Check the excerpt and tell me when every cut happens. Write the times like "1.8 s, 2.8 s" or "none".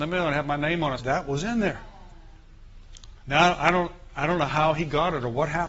1.0 s, 3.2 s